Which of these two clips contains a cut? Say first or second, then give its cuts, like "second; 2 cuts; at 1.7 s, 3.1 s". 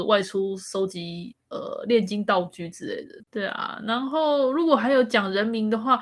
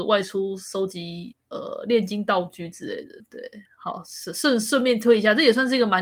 first; 1 cut; at 3.2 s